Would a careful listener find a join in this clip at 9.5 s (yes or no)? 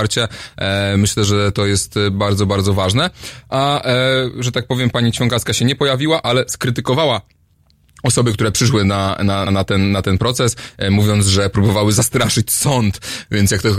yes